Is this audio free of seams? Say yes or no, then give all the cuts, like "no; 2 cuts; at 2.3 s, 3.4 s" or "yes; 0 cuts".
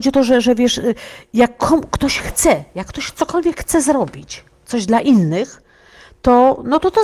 yes; 0 cuts